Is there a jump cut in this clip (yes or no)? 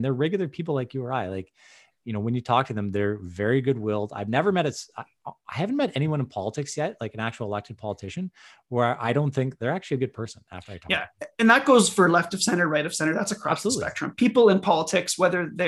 no